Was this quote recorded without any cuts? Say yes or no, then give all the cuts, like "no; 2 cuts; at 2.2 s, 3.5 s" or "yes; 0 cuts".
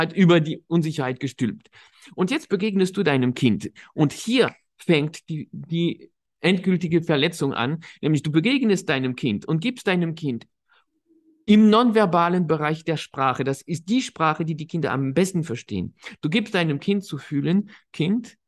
yes; 0 cuts